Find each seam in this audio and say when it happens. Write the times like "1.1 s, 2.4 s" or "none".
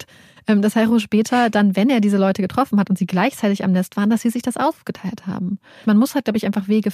none